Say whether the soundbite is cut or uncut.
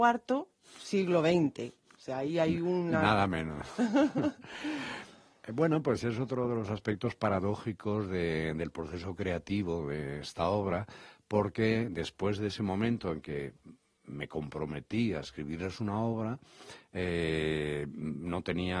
uncut